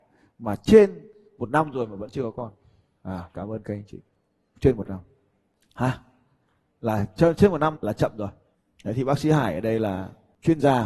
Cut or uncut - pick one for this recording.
cut